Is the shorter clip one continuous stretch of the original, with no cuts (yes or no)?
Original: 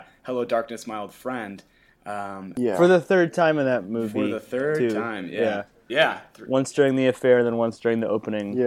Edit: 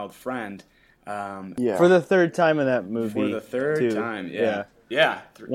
yes